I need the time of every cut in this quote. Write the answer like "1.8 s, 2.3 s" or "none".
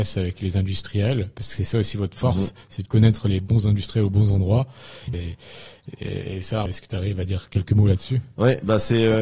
5.1 s, 6.7 s